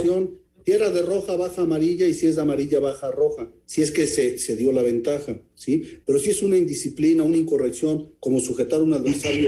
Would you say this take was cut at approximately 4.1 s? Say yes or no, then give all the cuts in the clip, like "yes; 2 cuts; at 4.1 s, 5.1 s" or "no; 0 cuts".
no; 1 cut; at 6.0 s